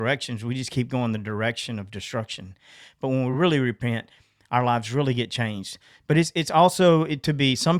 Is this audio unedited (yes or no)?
yes